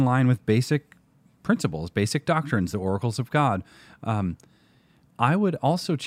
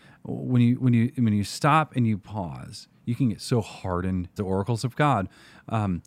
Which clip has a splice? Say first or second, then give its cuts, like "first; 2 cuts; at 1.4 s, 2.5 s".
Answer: second; 1 cut; at 4.4 s